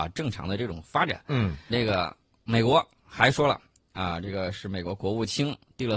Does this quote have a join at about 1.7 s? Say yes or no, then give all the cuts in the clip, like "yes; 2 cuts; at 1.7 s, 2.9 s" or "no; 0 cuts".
yes; 1 cut; at 1.7 s